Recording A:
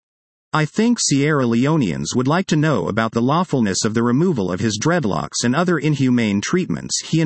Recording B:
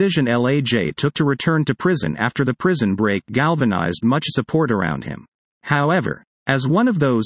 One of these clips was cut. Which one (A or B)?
B